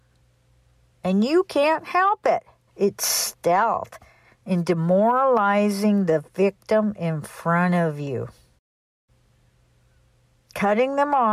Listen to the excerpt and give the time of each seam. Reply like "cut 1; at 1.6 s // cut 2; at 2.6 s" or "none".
cut 1; at 2.7 s